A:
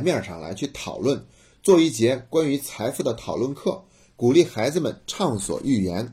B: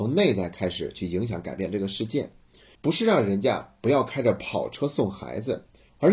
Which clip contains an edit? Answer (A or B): B